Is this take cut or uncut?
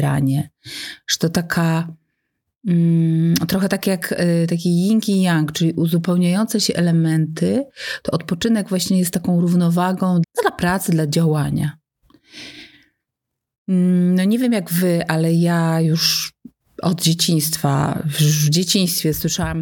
cut